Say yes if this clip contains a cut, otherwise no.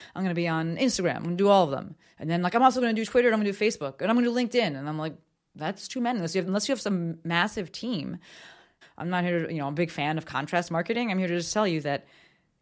yes